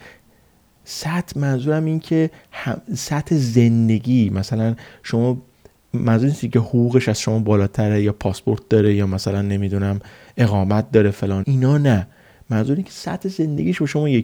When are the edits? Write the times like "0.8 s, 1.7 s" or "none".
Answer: 11.4 s